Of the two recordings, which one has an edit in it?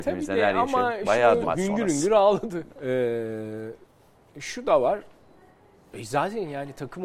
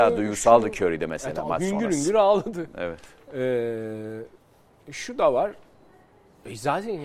first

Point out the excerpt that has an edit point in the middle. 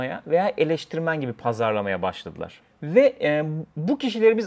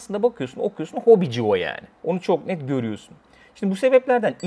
second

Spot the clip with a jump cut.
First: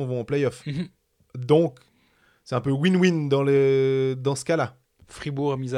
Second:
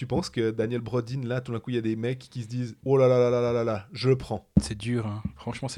second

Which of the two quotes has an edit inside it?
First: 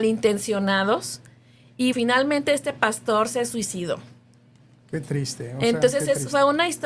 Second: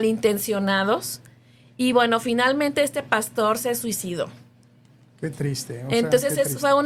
first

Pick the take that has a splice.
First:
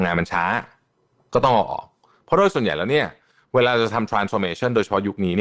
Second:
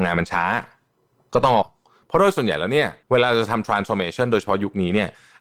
second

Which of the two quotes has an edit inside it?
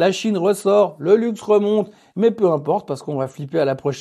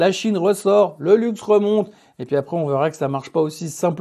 first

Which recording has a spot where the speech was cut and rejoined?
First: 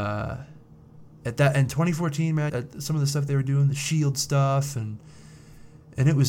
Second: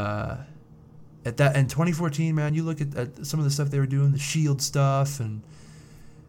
first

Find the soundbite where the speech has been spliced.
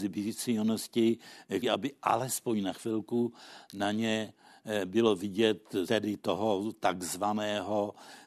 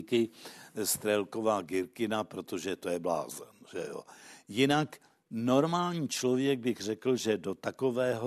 first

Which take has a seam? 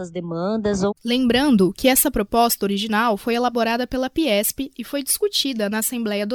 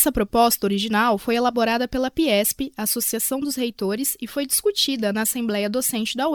first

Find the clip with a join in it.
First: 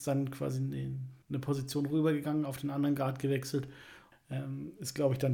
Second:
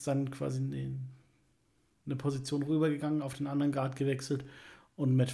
first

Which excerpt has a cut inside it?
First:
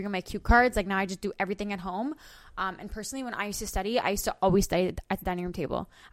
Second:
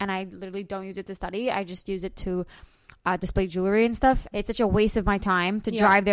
second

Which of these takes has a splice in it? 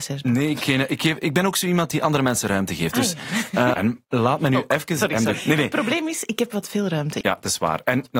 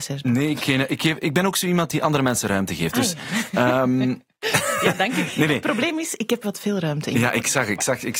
first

